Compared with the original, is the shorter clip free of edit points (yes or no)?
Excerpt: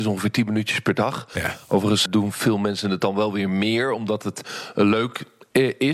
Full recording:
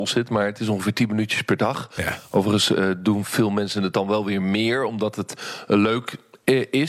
no